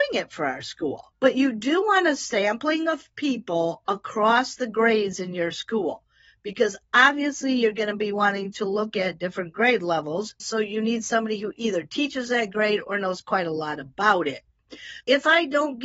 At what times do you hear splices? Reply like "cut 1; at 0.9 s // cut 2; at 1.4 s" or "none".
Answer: none

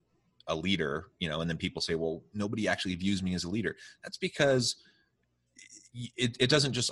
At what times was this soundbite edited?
none

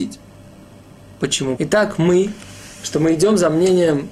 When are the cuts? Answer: cut 1; at 1.6 s

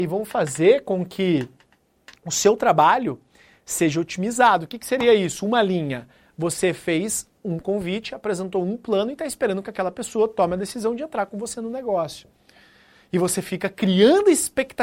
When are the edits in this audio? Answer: none

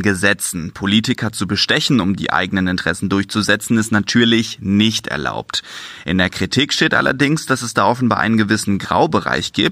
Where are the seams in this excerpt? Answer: none

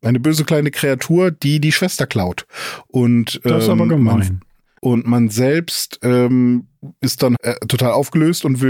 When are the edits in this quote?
cut 1; at 4.8 s // cut 2; at 7.3 s

